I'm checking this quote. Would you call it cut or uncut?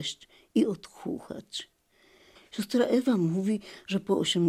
cut